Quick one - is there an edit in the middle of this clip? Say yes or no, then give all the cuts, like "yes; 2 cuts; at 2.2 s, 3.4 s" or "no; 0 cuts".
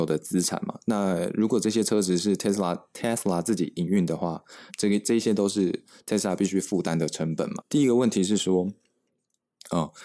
yes; 2 cuts; at 4.7 s, 7.6 s